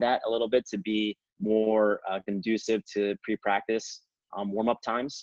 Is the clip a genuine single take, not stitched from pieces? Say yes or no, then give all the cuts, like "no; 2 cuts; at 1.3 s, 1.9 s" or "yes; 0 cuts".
yes; 0 cuts